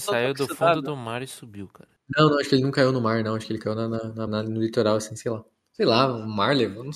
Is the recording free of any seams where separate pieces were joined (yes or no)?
no